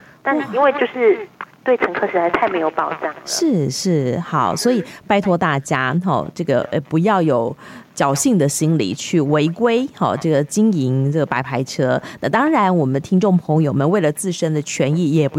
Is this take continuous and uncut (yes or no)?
yes